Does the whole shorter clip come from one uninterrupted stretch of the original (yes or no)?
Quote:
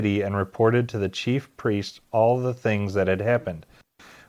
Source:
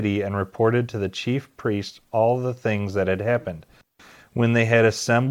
yes